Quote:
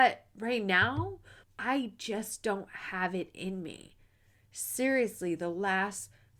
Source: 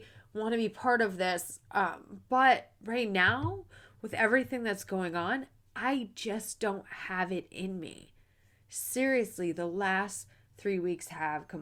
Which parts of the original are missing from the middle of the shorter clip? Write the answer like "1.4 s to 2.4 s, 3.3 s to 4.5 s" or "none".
3.9 s to 5.6 s